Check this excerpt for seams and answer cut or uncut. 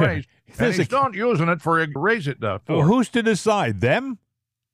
cut